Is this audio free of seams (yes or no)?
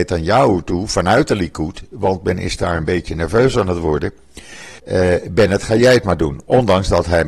no